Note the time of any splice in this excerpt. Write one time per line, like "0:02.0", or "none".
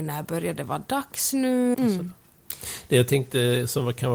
0:01.7